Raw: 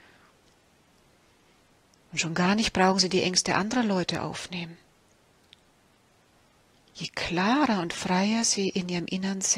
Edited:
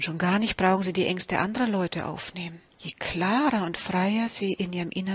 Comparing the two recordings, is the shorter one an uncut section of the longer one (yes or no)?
no